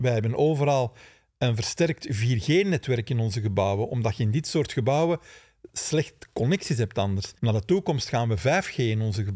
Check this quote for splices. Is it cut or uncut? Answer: cut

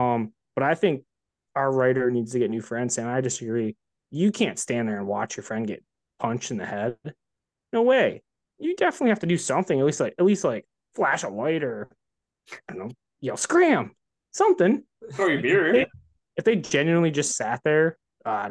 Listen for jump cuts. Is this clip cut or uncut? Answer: uncut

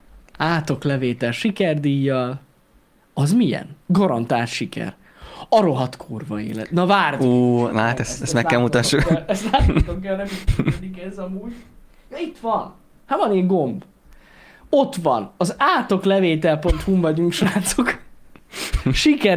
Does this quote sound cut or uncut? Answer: cut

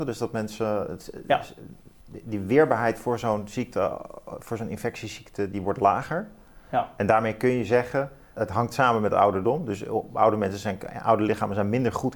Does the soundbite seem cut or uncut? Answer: cut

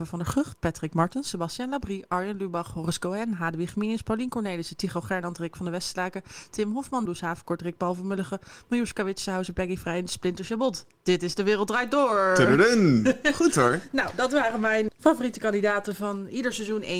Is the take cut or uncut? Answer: cut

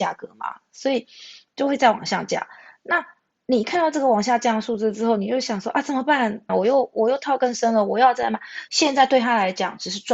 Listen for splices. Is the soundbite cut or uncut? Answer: cut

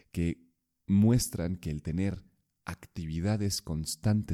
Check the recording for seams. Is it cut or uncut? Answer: uncut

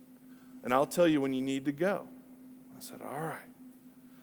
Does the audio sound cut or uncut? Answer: uncut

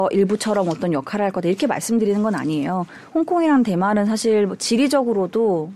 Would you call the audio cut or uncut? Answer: uncut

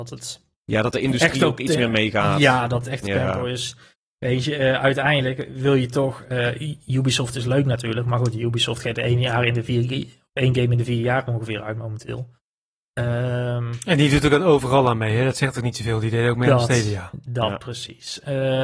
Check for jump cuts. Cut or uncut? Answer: uncut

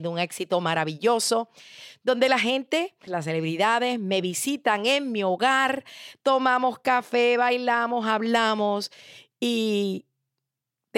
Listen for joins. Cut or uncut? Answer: cut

